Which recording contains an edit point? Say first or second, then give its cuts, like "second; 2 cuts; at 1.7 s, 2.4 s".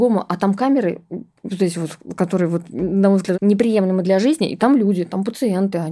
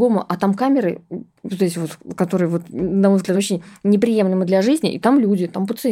first; 1 cut; at 3.3 s